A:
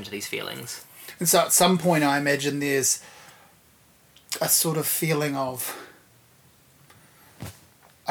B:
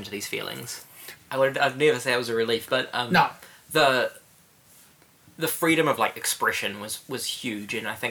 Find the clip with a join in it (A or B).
B